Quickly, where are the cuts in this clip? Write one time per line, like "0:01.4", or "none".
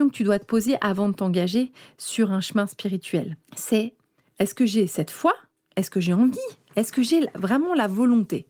0:03.4

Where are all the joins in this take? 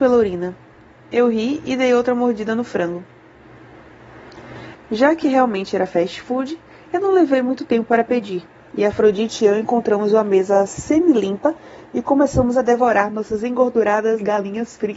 0:04.7

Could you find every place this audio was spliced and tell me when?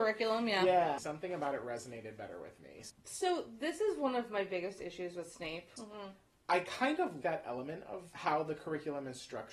0:01.0
0:05.8
0:07.2

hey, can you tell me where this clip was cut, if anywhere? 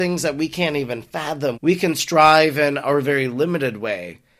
0:01.5

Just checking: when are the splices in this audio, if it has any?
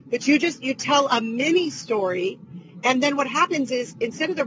none

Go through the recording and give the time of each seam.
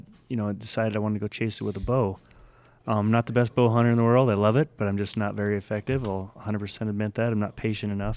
none

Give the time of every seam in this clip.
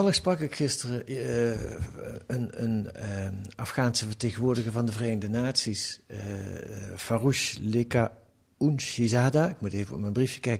none

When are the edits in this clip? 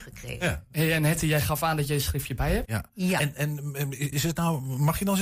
0:02.6
0:04.1

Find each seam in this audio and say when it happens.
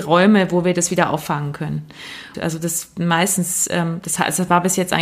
0:02.3

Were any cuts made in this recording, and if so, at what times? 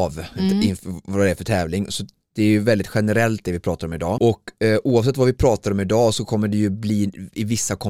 0:04.2

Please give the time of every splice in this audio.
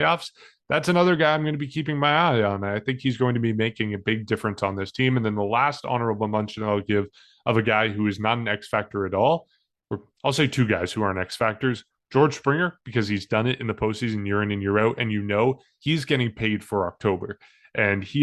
none

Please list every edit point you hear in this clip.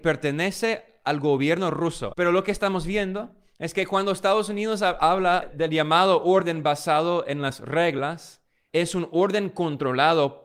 0:02.1
0:08.7

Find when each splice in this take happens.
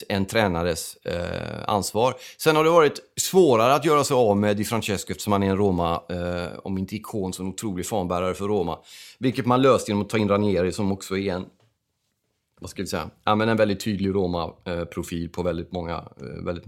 none

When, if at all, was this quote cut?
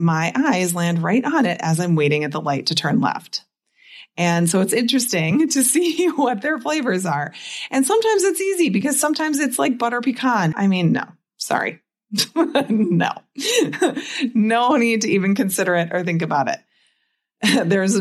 0:10.5

